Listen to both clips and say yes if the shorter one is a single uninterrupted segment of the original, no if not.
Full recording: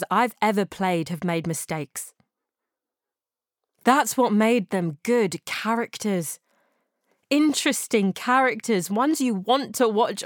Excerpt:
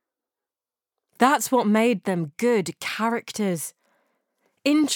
yes